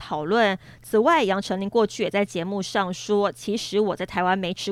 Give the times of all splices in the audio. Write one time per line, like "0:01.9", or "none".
none